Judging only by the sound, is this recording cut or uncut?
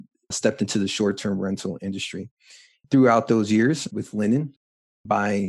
cut